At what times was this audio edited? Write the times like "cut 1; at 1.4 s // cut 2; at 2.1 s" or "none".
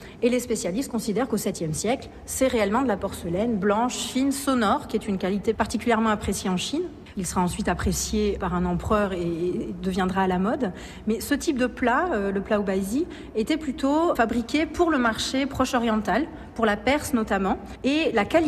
cut 1; at 7.1 s

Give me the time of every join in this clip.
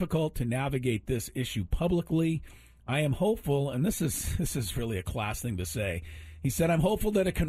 none

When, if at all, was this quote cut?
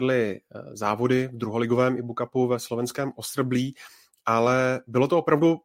none

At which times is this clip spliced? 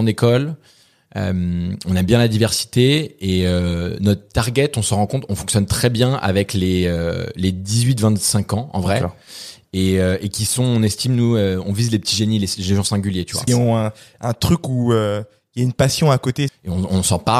cut 1; at 13.5 s // cut 2; at 16.5 s

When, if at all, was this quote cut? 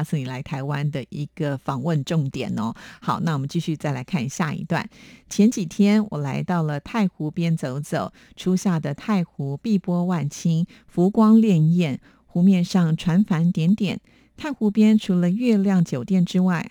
none

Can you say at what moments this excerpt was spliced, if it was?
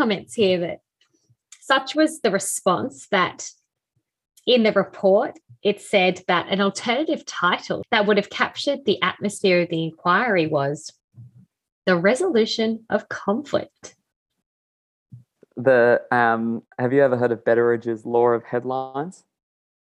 cut 1; at 15.4 s // cut 2; at 16.7 s

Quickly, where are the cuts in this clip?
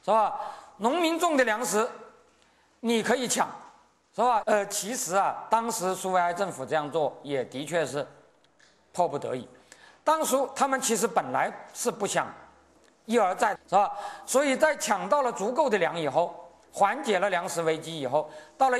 cut 1; at 4.4 s // cut 2; at 13.6 s

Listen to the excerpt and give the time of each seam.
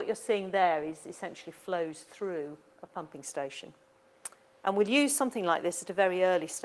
none

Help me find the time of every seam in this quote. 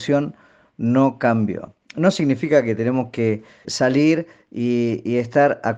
cut 1; at 3.6 s

